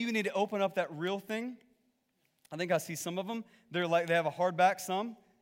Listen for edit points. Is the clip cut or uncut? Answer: uncut